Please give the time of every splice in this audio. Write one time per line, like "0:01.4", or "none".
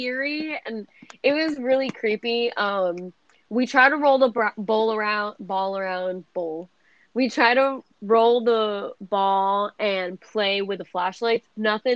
none